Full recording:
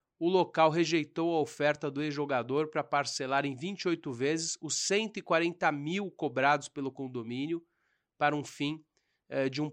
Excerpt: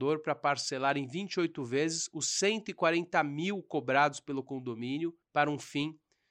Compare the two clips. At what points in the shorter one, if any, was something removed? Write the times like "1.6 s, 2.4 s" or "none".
5.2 s